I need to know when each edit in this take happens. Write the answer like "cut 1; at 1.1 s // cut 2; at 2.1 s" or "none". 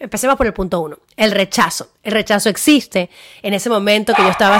none